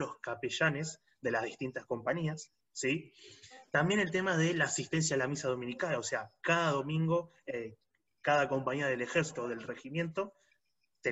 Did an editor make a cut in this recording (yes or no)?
no